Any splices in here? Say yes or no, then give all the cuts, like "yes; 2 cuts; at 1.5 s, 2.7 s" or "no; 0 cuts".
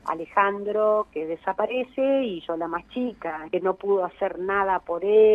yes; 1 cut; at 3.5 s